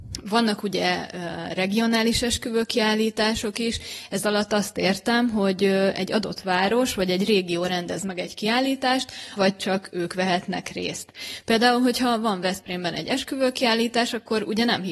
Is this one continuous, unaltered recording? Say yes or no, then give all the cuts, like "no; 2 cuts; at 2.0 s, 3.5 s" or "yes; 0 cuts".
no; 1 cut; at 9.4 s